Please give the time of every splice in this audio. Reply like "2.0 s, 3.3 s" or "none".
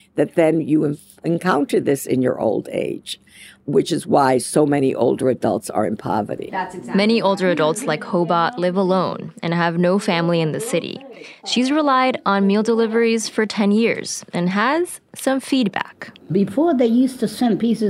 6.5 s